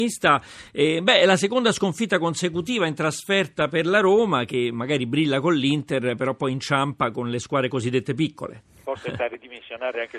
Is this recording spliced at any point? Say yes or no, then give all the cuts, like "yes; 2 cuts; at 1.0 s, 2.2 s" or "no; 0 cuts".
yes; 1 cut; at 8.8 s